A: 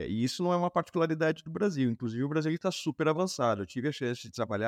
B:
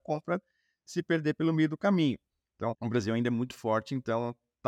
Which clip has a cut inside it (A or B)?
B